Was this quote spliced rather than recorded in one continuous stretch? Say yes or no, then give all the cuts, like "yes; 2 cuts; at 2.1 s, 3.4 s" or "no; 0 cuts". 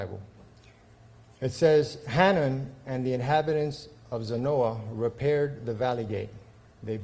no; 0 cuts